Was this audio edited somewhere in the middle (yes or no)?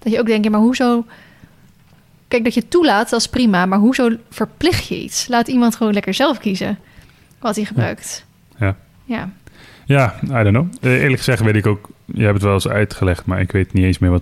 no